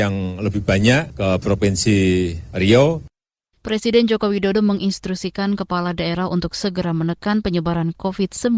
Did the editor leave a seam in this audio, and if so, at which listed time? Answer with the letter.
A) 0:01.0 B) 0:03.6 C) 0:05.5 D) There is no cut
B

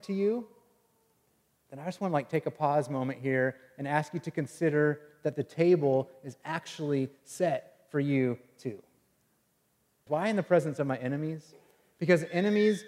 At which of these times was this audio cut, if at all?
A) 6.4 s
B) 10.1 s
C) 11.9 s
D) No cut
B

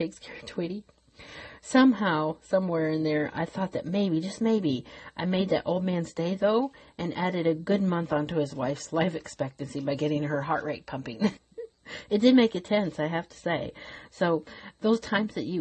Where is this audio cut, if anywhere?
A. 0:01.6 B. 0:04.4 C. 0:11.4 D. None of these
C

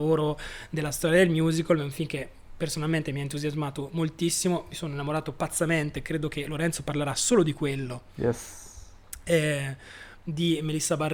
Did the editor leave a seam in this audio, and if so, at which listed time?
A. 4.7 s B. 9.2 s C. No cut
C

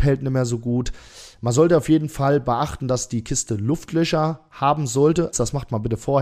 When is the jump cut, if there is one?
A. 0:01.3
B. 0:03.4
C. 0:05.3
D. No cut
C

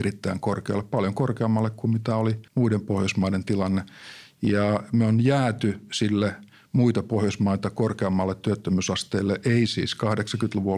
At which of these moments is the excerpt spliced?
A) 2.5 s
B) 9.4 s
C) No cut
A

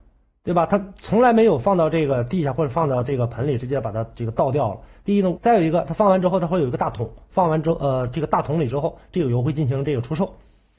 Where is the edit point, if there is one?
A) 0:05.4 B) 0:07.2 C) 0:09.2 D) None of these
A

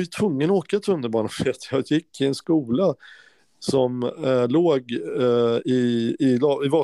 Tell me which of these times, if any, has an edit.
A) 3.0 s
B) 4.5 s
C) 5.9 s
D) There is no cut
D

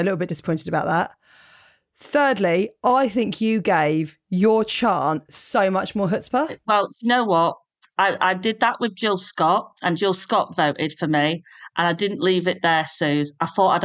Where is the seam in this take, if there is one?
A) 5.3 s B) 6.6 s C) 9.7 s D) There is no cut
D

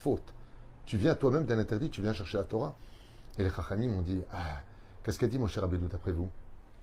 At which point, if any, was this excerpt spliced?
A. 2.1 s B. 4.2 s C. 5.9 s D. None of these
D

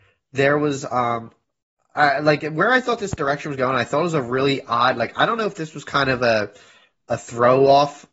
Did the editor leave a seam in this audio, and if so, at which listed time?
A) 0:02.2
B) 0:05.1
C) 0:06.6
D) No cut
D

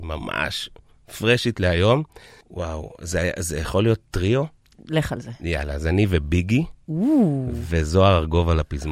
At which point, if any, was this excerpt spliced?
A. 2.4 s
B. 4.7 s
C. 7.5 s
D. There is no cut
A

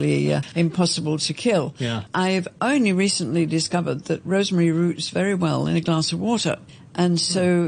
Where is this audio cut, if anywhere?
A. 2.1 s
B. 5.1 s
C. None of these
A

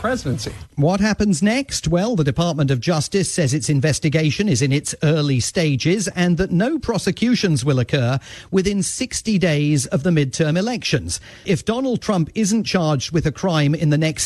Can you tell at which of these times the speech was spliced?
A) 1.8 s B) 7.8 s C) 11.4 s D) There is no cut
C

